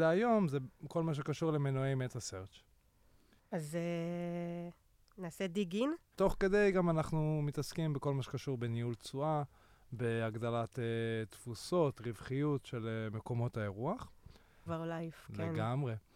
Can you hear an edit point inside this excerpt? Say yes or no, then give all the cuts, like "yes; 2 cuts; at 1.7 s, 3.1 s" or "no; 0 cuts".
yes; 2 cuts; at 6.1 s, 14.7 s